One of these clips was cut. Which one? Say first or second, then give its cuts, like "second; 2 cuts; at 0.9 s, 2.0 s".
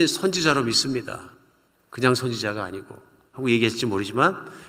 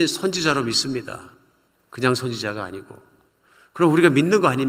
first; 1 cut; at 3.3 s